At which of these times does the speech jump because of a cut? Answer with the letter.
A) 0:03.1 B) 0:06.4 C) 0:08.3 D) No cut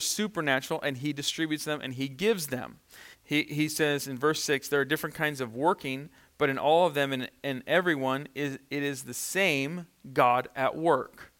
A